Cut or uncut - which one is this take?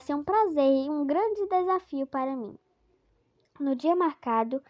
uncut